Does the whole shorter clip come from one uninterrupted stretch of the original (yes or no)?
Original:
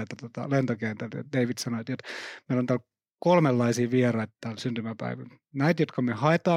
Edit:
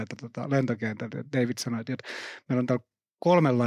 yes